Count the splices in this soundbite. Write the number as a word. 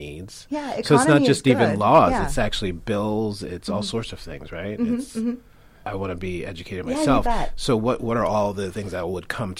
one